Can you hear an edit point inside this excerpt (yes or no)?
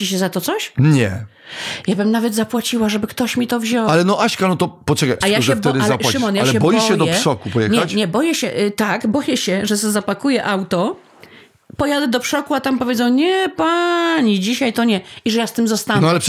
yes